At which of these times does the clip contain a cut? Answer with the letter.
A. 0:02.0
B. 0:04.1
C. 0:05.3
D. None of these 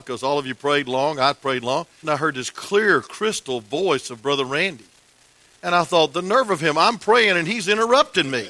A